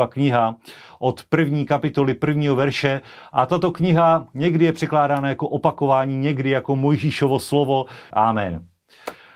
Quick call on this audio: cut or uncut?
cut